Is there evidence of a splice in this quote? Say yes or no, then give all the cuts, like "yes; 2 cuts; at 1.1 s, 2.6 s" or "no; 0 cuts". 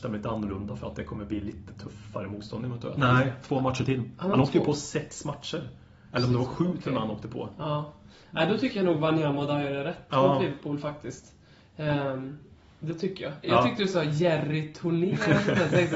yes; 2 cuts; at 2.9 s, 13.4 s